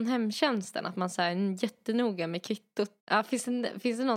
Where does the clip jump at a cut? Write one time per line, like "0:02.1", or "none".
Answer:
0:03.0